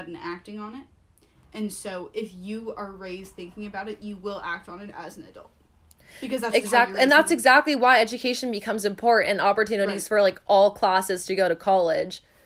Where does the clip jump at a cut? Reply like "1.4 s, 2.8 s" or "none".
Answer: none